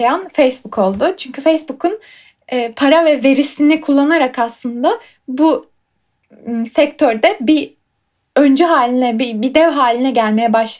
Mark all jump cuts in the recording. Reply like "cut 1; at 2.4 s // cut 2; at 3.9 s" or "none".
none